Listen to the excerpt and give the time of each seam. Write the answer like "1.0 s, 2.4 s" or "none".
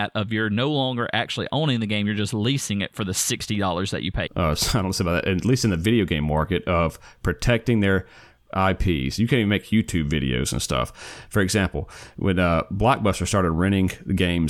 4.3 s